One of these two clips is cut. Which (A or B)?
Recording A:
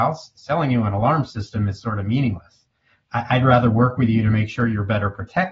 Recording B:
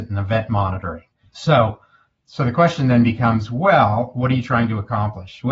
B